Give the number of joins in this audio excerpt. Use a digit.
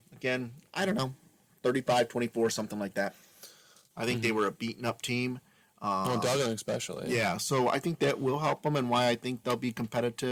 1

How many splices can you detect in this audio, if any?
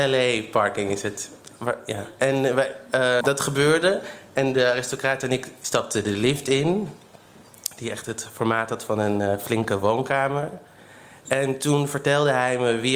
1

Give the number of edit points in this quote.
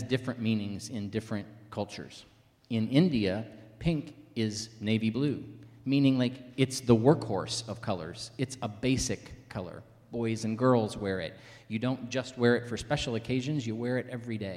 0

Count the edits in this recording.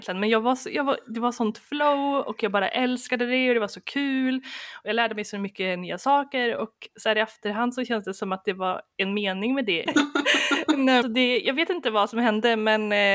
2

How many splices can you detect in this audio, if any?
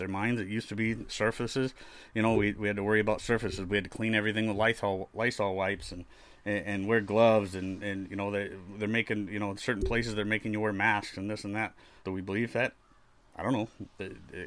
1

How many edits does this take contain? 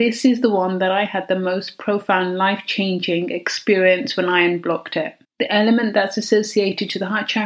1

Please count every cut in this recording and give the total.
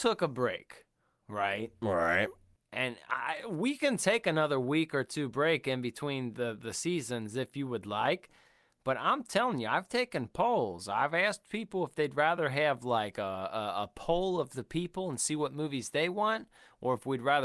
0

